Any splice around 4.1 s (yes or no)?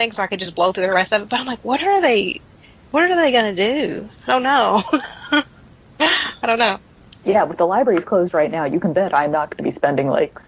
no